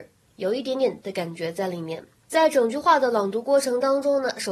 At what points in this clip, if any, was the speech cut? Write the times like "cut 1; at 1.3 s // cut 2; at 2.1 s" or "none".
cut 1; at 1.0 s // cut 2; at 2.1 s